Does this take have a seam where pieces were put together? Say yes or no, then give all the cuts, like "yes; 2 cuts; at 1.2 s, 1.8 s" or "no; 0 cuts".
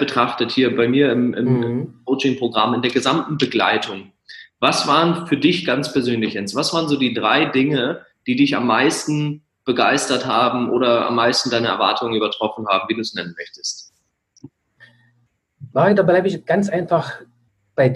no; 0 cuts